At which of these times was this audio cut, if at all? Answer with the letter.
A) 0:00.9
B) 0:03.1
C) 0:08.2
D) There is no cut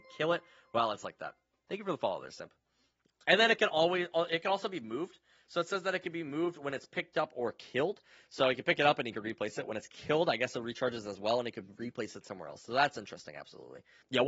B